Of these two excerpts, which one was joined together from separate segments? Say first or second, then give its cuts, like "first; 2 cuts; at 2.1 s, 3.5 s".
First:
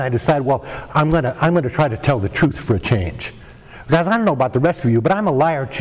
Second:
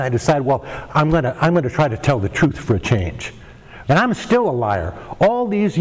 second; 1 cut; at 3.8 s